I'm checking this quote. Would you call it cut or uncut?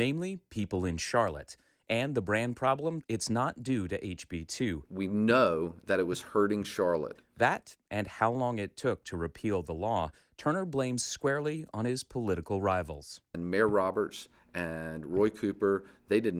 cut